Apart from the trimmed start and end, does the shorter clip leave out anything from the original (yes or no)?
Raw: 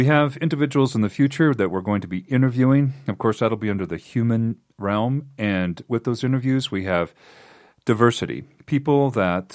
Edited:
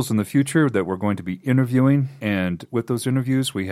yes